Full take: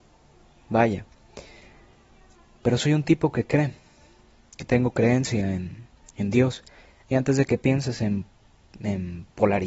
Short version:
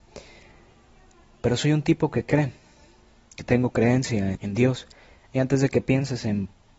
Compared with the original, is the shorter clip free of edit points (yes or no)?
no